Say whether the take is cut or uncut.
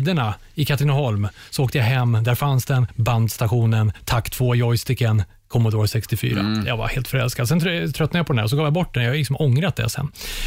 uncut